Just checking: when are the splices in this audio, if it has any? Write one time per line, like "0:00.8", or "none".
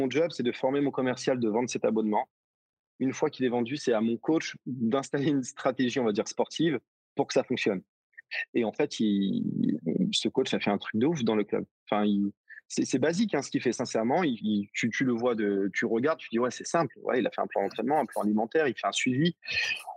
none